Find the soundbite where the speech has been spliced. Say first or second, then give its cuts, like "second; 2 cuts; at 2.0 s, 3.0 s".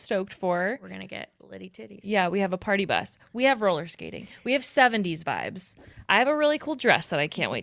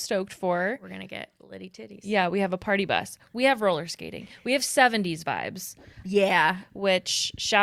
second; 1 cut; at 6.0 s